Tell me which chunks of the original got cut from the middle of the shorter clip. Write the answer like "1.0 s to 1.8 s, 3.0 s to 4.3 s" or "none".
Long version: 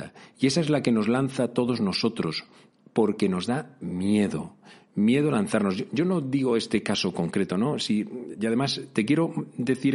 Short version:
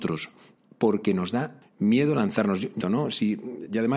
3.8 s to 4.8 s, 6.0 s to 7.5 s